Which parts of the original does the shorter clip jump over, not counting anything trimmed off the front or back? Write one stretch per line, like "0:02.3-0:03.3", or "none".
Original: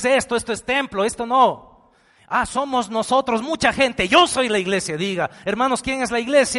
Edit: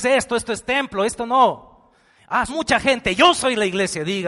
0:02.5-0:03.4